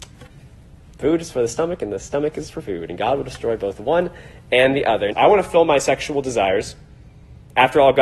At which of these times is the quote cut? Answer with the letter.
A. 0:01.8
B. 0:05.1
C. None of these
B